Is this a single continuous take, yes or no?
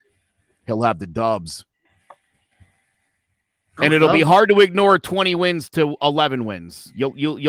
yes